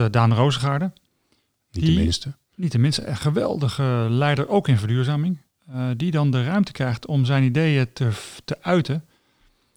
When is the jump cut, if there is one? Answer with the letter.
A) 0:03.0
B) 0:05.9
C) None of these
C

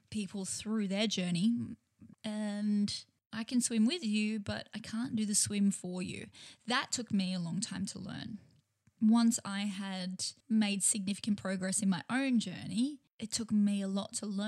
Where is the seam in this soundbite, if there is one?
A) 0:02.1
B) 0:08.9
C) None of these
A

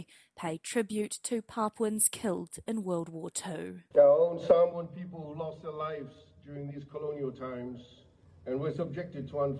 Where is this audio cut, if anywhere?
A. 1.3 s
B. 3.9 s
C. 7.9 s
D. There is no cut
B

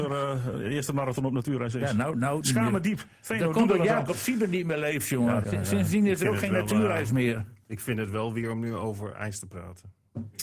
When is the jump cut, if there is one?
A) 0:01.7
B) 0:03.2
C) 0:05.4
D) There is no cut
C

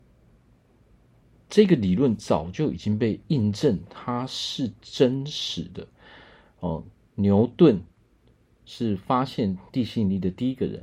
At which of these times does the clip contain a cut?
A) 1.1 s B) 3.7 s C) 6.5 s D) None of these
C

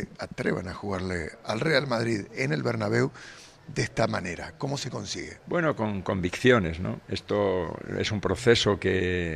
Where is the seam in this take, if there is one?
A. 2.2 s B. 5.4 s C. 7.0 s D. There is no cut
B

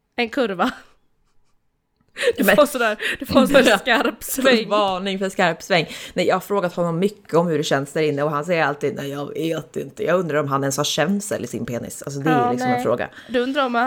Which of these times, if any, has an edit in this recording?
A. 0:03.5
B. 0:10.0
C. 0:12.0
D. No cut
A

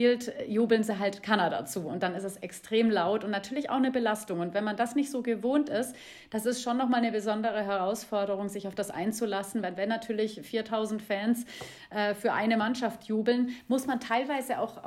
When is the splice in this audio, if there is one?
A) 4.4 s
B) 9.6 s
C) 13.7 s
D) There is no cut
D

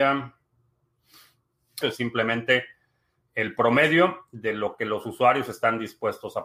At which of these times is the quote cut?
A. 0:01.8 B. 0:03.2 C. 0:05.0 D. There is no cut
A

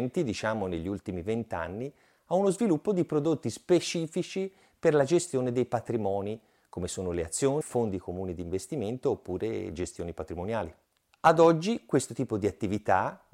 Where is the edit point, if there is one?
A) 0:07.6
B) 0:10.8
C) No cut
A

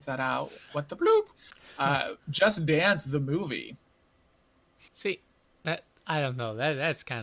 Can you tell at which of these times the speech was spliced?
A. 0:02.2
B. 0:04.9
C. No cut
B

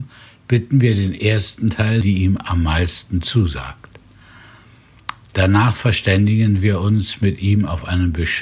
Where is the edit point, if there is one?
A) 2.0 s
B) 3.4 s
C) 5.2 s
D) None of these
A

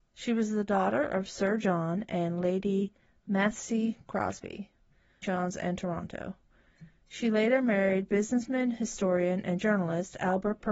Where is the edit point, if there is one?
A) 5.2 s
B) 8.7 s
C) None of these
A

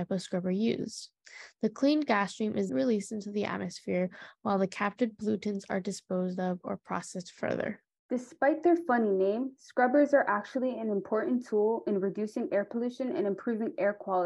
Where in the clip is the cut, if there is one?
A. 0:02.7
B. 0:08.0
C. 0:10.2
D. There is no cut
A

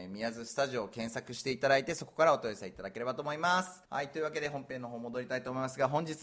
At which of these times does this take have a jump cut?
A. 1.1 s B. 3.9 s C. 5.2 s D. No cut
B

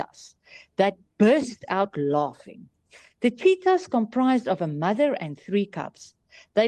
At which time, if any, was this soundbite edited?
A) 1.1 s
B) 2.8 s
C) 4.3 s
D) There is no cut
D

